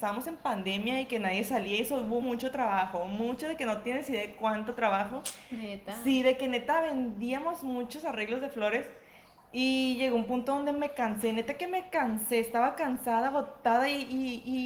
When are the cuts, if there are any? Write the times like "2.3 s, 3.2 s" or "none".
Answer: 2.2 s